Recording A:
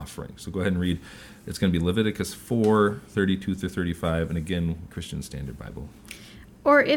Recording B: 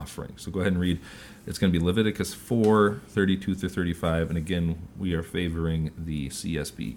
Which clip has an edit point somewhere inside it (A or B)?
A